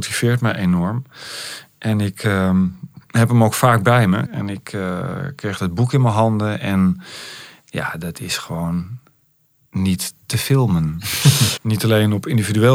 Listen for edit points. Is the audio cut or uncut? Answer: cut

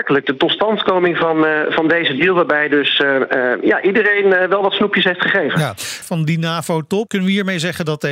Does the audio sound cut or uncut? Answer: cut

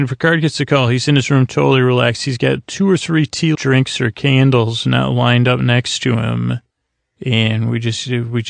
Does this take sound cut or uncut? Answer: cut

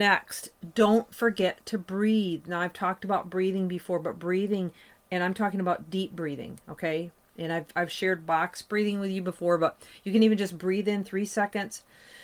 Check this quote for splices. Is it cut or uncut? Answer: uncut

